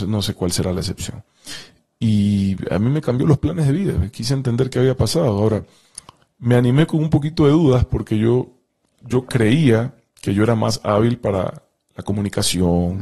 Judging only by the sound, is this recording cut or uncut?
uncut